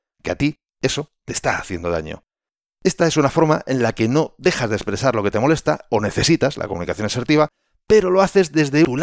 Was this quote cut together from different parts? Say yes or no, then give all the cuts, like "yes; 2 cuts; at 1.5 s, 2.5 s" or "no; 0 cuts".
no; 0 cuts